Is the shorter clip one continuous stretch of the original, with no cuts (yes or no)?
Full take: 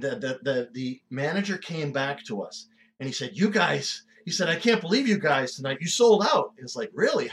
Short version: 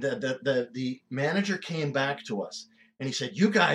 yes